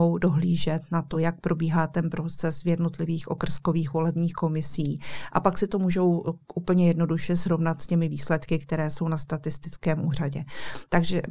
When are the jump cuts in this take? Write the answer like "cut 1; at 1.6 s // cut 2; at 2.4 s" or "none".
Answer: cut 1; at 1.1 s